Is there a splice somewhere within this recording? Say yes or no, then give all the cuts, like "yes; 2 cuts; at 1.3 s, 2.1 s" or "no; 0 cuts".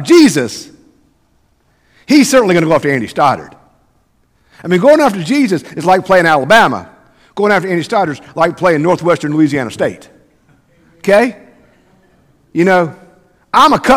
no; 0 cuts